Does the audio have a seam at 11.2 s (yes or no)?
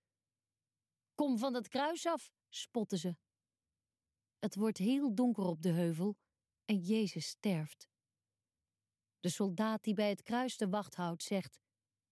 no